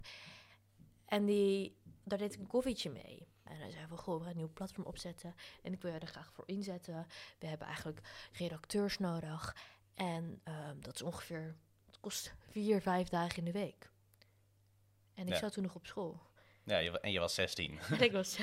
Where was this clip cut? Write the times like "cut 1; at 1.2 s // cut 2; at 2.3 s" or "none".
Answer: cut 1; at 3.5 s

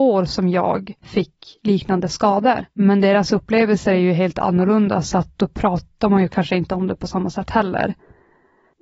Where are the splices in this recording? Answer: none

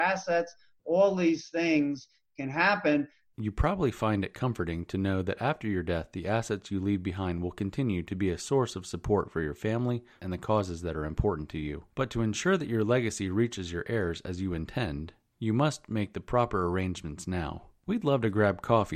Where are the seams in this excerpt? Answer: cut 1; at 3.3 s // cut 2; at 10.2 s

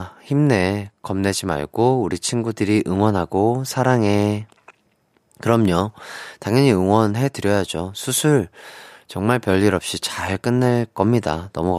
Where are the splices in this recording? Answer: none

